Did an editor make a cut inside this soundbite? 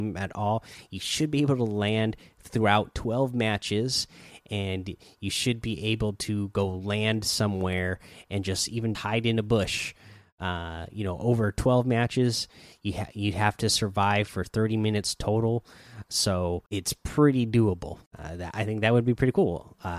yes; 3 cuts; at 8.9 s, 16.7 s, 18.1 s

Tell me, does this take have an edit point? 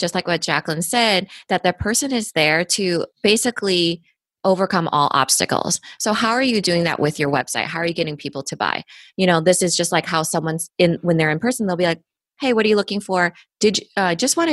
yes; 1 cut; at 13.5 s

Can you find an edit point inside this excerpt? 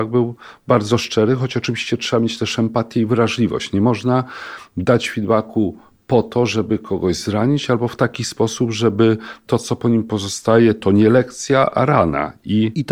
no; 0 cuts

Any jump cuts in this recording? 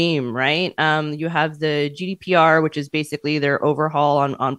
no; 0 cuts

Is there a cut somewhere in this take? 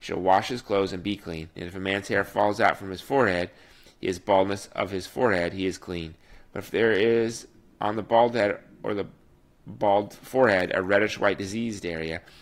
yes; 1 cut; at 1.6 s

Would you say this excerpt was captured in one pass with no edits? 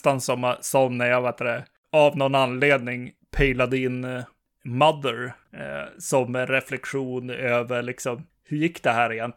yes; 0 cuts

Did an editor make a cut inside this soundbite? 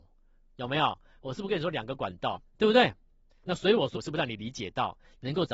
yes; 2 cuts; at 2.5 s, 3.9 s

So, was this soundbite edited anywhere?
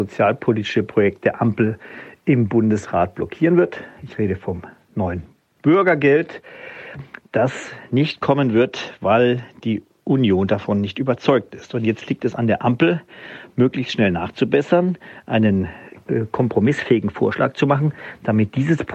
no; 0 cuts

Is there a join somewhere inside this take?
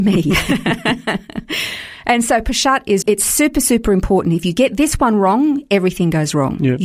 yes; 1 cut; at 3.0 s

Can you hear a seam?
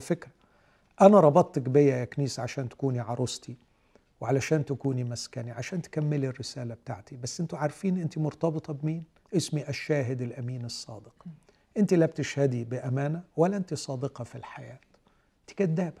yes; 1 cut; at 9.3 s

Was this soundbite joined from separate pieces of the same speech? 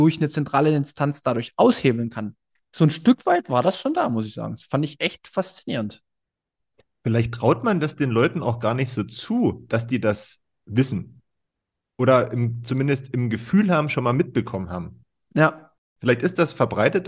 no; 0 cuts

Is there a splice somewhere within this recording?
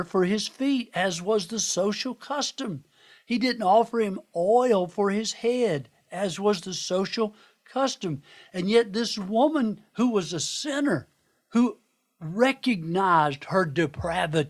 no; 0 cuts

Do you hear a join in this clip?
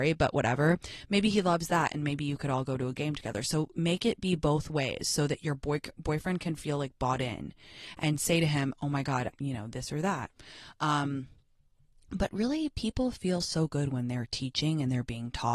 yes; 1 cut; at 9.3 s

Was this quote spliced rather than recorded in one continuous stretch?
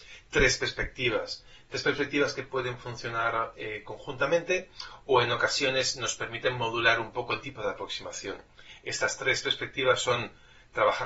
no; 0 cuts

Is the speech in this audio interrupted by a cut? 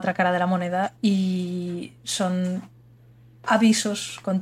no; 0 cuts

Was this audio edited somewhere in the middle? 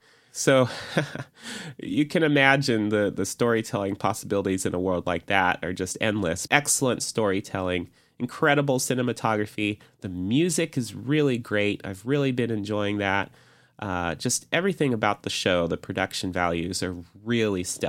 yes; 1 cut; at 6.5 s

